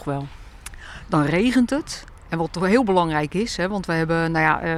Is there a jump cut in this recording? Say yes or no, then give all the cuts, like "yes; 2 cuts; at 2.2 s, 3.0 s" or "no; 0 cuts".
no; 0 cuts